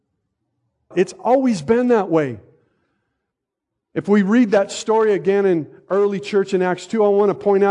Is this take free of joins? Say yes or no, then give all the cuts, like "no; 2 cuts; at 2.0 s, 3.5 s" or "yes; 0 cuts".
no; 1 cut; at 0.9 s